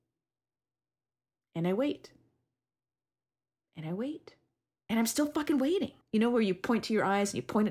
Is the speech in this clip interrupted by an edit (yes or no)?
yes